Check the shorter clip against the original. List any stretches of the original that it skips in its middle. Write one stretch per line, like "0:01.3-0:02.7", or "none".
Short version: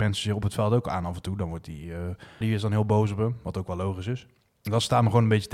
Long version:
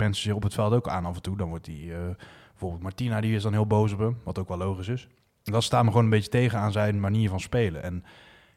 0:02.4-0:03.2